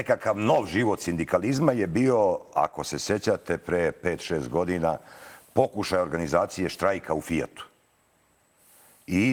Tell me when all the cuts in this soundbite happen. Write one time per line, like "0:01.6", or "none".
none